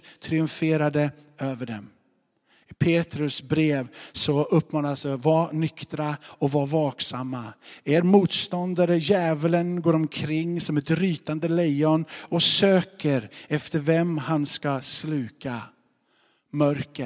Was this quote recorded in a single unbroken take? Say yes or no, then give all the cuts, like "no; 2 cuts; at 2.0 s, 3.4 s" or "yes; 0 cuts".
yes; 0 cuts